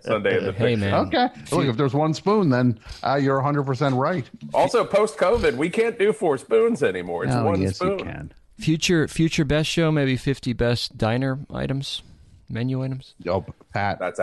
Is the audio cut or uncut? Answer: uncut